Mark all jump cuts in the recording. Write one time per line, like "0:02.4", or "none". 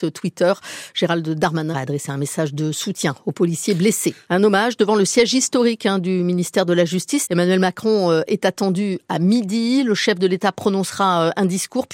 0:01.7
0:04.2
0:07.2